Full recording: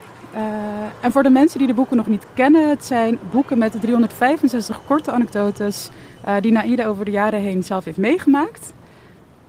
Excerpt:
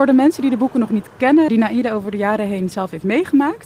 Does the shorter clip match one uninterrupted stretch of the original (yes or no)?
no